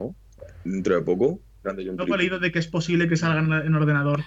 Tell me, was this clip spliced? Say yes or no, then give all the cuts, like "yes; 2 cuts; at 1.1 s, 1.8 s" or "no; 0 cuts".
yes; 1 cut; at 1.6 s